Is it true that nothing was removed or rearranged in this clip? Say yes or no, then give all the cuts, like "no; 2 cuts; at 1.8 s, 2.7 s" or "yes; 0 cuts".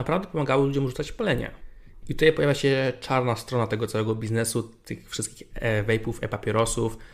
no; 1 cut; at 2.0 s